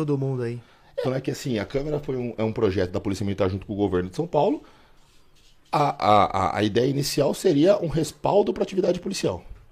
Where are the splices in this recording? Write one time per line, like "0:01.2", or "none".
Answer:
0:01.0

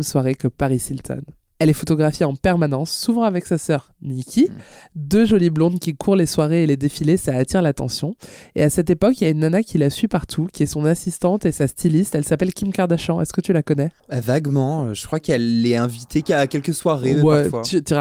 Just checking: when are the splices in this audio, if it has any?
none

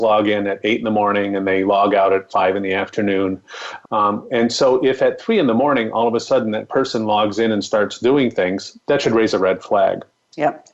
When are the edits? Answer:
0:03.8

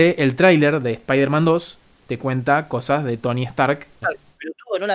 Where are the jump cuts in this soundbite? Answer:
0:04.0

